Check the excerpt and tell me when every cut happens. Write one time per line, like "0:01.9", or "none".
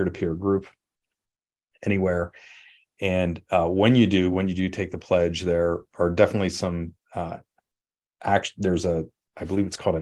none